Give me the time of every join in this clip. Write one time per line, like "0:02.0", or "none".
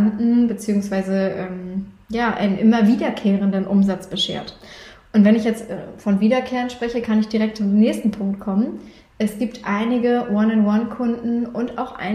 none